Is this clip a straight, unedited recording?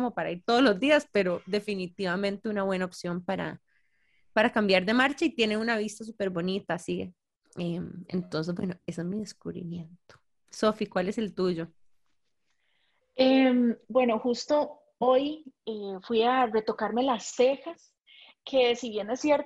no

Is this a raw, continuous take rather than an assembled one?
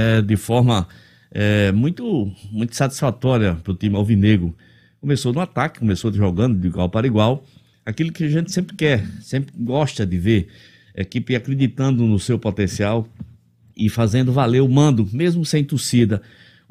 yes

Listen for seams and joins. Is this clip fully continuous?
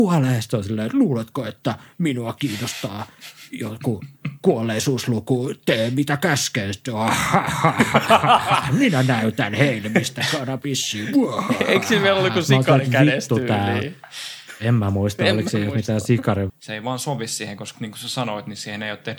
no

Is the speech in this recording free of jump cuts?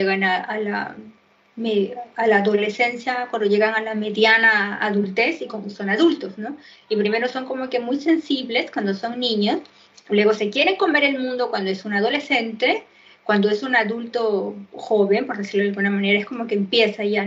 yes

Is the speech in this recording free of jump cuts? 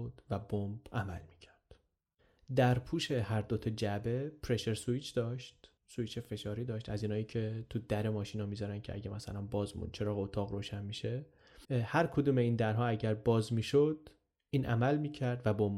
no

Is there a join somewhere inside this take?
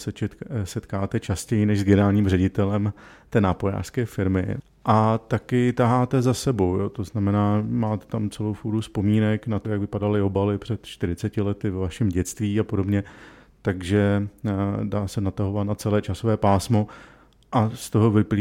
no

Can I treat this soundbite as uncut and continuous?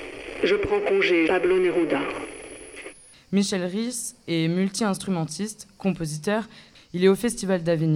no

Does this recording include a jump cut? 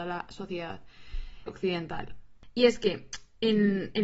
yes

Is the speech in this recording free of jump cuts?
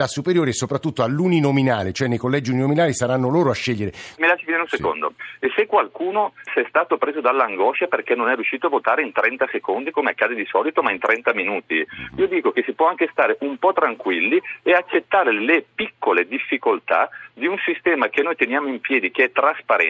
no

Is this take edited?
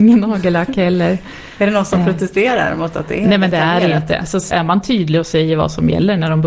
yes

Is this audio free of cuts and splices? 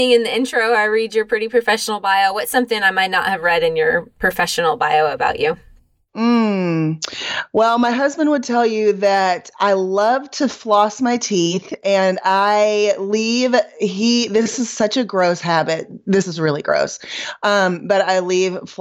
yes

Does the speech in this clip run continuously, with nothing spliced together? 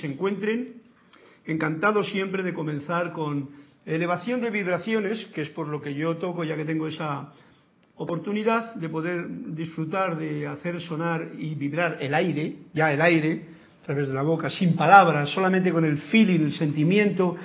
yes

